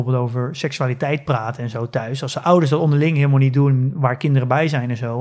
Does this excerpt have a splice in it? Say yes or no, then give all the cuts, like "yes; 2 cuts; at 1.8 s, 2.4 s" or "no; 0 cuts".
no; 0 cuts